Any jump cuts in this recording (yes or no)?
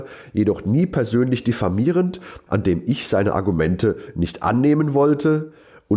yes